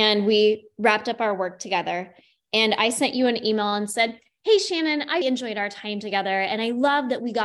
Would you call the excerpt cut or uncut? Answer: cut